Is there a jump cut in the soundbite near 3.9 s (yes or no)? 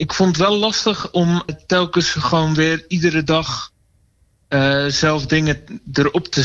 no